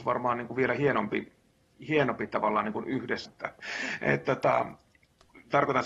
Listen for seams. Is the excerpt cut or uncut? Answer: cut